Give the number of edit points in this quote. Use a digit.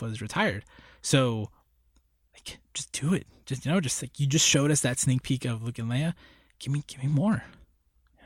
0